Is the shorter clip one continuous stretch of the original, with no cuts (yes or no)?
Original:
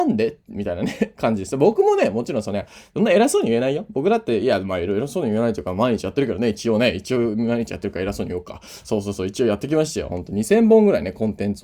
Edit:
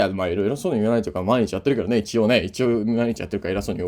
yes